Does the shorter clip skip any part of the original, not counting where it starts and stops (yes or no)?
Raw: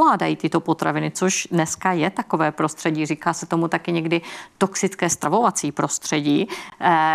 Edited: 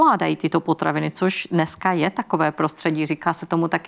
no